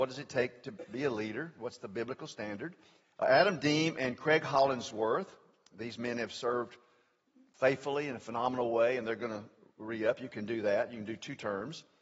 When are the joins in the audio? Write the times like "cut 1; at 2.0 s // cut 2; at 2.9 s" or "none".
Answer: cut 1; at 1.6 s // cut 2; at 3.1 s